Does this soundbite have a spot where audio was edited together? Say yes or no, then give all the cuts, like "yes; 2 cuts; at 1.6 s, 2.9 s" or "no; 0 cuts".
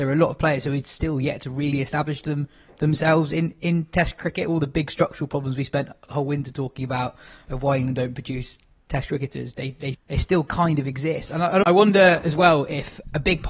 yes; 2 cuts; at 9.9 s, 11.6 s